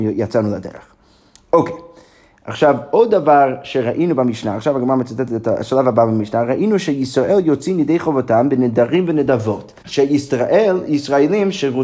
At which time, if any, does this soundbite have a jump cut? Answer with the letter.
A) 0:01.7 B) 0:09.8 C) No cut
B